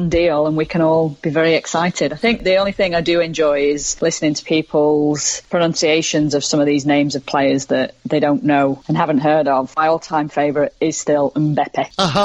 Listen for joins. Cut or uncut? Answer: uncut